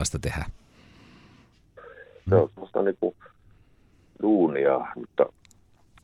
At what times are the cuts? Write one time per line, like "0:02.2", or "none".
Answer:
0:02.3
0:05.0